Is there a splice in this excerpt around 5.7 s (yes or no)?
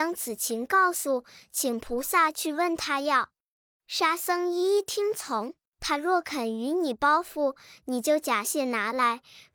yes